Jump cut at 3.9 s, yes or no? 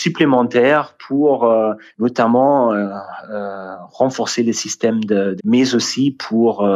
no